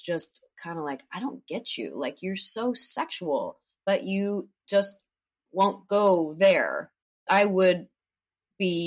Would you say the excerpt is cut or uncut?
uncut